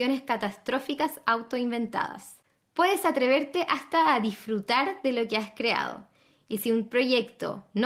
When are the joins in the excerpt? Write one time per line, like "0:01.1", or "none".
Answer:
none